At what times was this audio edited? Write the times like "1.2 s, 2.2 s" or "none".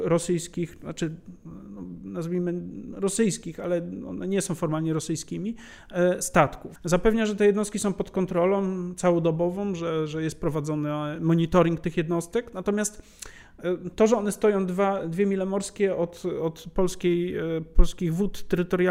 6.8 s